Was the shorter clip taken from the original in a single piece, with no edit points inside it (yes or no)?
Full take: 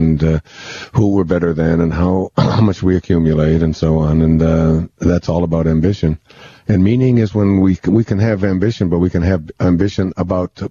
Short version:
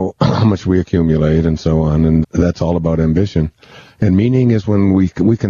no